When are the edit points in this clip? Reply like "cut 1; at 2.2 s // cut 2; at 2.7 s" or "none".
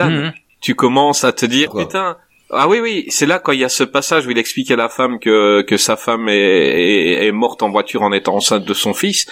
cut 1; at 1.7 s